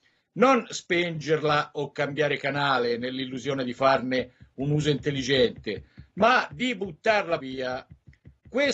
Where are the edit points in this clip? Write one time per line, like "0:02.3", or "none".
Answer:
0:07.4